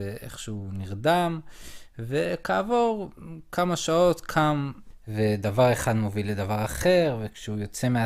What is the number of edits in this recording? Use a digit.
1